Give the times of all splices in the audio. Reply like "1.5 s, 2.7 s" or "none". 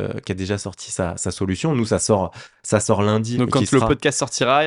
3.3 s